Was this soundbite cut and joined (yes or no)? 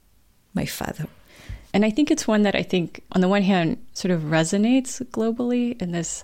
yes